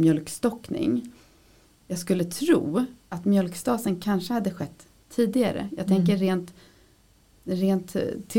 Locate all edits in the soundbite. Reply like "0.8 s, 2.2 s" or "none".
none

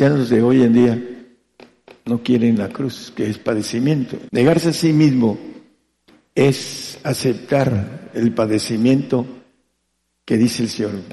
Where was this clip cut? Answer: 4.3 s

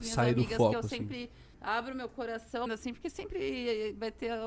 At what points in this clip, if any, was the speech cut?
1.5 s, 2.7 s

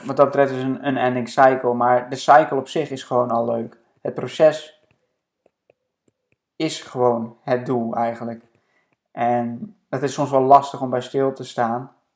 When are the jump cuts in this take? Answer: none

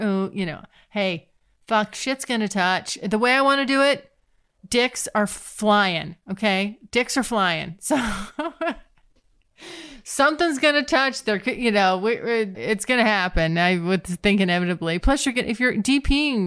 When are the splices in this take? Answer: 12.5 s

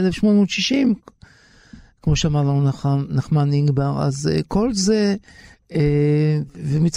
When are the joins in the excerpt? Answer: none

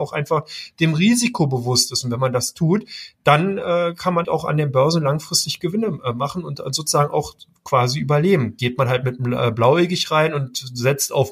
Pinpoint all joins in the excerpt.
4.2 s

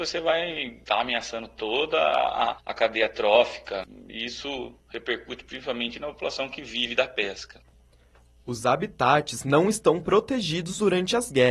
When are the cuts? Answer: none

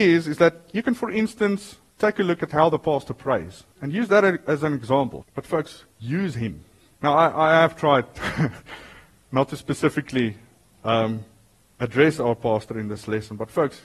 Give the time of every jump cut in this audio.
3.7 s, 5.2 s, 6.9 s

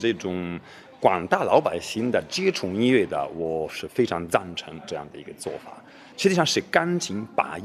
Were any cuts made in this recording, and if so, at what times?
none

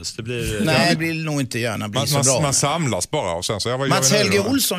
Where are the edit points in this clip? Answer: 1.0 s

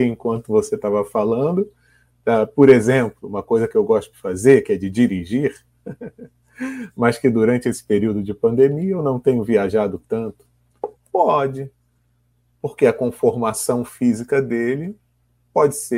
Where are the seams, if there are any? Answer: 4.1 s, 11.0 s

